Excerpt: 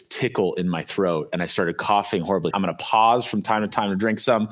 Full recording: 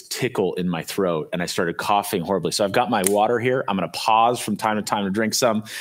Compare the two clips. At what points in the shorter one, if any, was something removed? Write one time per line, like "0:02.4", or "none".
0:02.5